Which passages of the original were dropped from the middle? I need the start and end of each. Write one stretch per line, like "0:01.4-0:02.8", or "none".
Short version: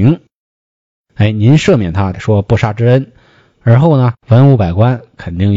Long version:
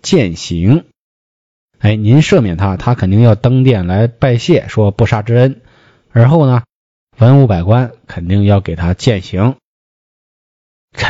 0:02.8-0:04.6
0:06.7-0:07.1

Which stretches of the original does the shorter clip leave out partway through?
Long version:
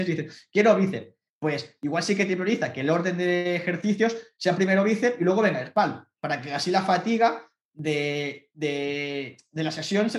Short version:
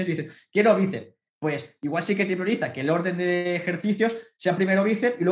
none

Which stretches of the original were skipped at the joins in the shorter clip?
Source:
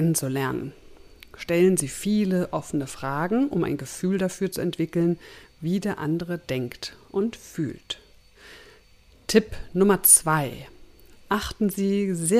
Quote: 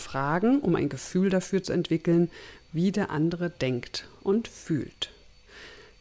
none

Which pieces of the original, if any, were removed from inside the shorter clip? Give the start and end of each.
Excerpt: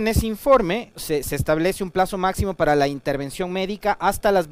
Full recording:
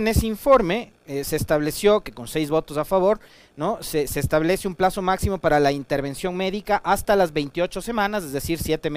0:01.0-0:03.8

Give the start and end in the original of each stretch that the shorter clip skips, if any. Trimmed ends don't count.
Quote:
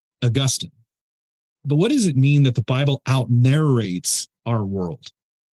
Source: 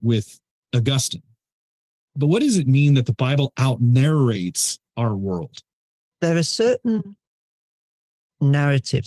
none

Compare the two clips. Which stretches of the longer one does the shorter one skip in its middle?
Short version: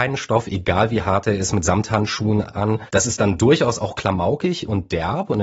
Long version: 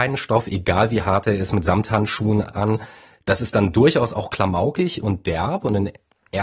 0:02.9-0:03.2

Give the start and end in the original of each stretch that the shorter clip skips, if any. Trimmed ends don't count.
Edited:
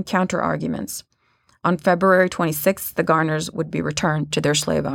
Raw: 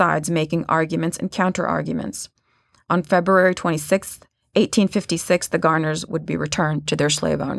0:04.2-0:05.5

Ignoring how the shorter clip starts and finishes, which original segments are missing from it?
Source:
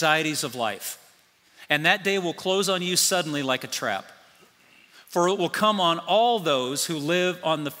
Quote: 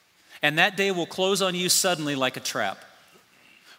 none

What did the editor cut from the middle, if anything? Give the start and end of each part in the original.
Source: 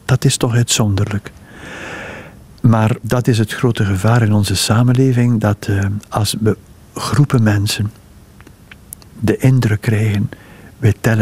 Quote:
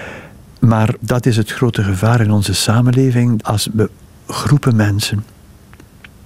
0:05.4-0:06.1

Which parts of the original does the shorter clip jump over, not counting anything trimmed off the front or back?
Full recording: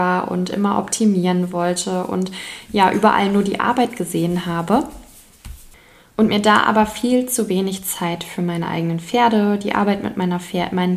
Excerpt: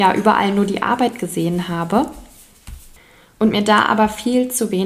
none

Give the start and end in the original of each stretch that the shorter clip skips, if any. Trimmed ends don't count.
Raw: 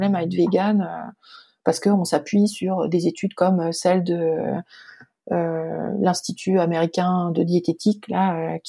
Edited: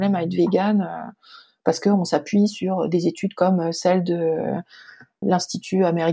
0:05.2-0:06.0

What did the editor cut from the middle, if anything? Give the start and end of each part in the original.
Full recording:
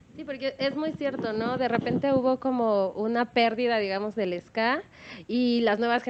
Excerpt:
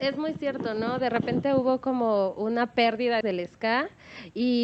0:03.8-0:04.1

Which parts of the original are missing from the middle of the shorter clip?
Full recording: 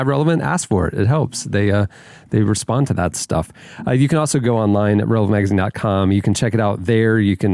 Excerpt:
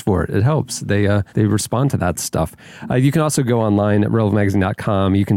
0:01.9-0:02.3

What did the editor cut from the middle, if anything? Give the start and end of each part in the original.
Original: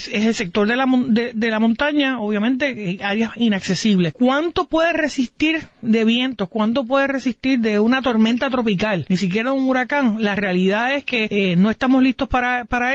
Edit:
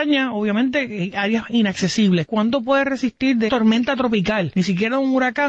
0:04.1-0:06.5
0:07.7-0:08.0

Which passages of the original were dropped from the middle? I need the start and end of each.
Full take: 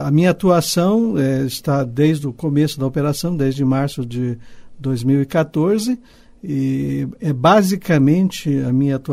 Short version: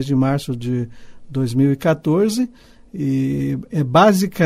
none

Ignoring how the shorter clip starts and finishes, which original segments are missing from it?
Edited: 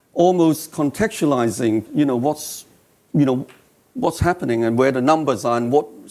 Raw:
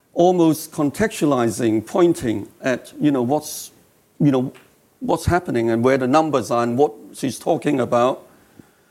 0:01.8-0:02.9

